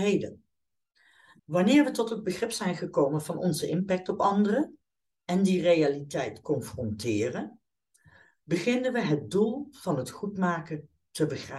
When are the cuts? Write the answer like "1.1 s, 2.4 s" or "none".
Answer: 1.4 s